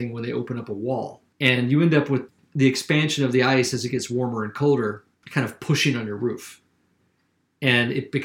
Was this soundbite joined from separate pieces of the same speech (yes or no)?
yes